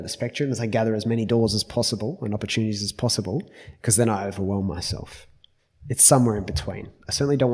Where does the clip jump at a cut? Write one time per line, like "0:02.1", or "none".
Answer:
none